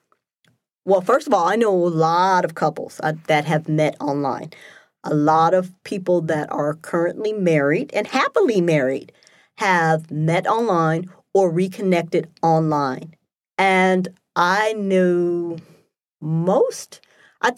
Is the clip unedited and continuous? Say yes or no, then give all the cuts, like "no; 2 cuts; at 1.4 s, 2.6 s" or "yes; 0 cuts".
yes; 0 cuts